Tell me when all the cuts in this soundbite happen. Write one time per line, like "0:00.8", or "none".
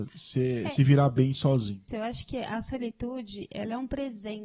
0:01.9